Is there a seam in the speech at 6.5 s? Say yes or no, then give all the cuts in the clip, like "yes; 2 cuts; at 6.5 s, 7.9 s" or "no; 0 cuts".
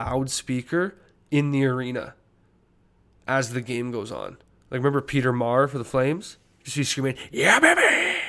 no; 0 cuts